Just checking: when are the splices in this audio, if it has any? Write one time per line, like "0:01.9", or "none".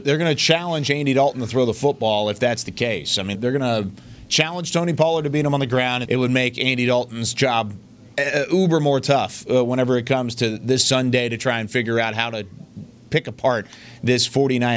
0:03.3
0:06.0